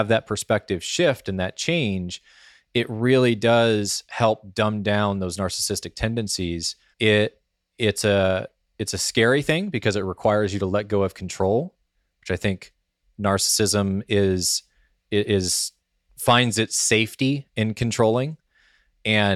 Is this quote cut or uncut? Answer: cut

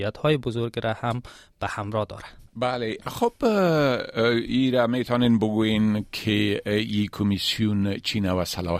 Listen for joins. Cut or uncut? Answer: cut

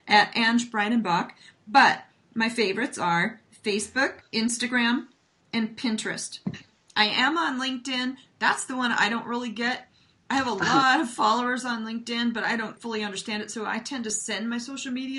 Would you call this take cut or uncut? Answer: uncut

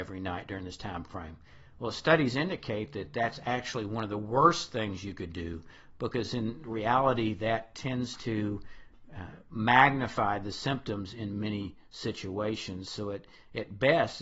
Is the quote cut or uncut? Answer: uncut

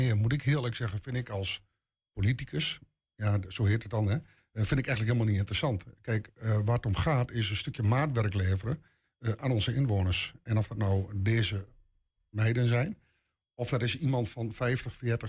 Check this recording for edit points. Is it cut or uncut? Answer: uncut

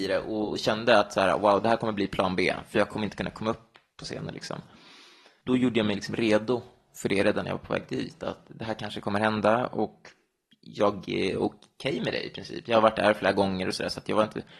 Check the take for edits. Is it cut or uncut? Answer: uncut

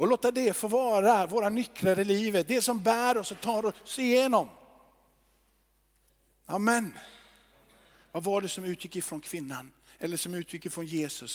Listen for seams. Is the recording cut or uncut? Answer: uncut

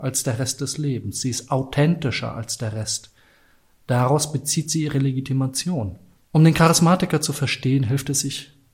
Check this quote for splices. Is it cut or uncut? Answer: cut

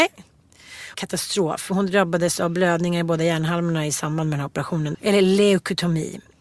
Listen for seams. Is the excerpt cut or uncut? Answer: cut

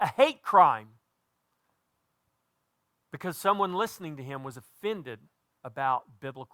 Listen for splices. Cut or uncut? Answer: uncut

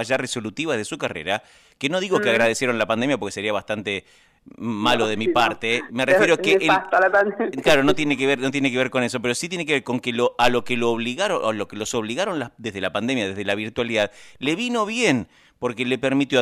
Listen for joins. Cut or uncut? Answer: uncut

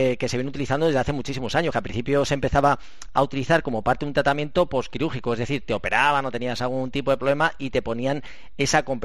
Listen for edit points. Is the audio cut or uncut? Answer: uncut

